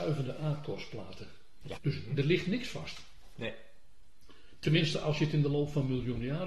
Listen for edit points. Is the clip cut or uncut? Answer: cut